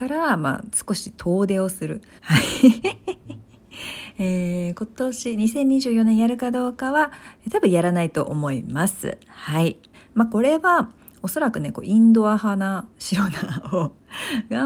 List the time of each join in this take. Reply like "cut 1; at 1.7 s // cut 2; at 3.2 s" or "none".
cut 1; at 2.2 s // cut 2; at 9.9 s